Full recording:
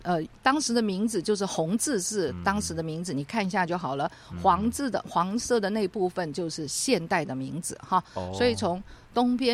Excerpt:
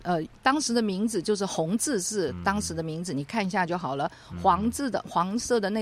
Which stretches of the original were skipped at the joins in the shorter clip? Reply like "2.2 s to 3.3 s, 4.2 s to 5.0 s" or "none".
none